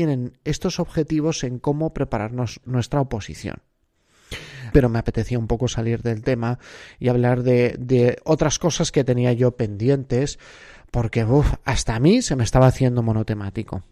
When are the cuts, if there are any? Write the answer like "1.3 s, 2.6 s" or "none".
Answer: 2.6 s, 4.7 s